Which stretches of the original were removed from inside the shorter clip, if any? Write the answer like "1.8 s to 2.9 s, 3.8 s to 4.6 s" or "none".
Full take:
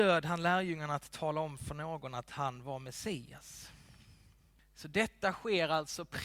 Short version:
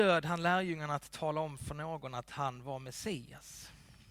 none